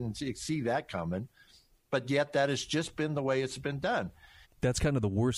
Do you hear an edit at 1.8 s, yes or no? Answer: no